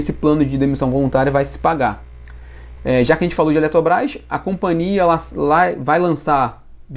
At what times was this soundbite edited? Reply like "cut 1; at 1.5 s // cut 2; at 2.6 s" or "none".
cut 1; at 2.8 s